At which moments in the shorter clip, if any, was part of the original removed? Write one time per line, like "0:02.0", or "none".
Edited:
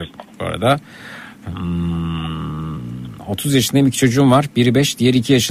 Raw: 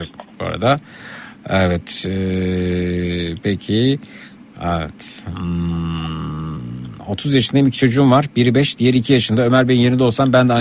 0:01.4